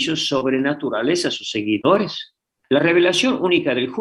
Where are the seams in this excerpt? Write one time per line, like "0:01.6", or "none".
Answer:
0:02.5